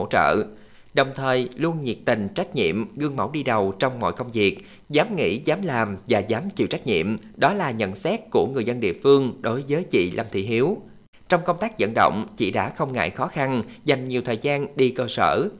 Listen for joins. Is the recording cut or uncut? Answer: cut